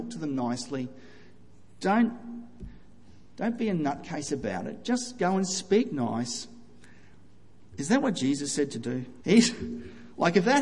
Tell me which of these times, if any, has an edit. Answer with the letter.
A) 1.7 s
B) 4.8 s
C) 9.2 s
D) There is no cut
C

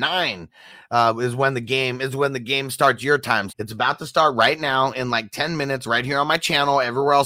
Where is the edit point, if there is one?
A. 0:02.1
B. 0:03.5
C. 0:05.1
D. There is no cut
B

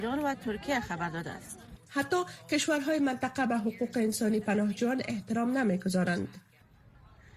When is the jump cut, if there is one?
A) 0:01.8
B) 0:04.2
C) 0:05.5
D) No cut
A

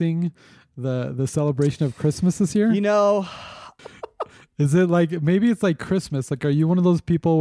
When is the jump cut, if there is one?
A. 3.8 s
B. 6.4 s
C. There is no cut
A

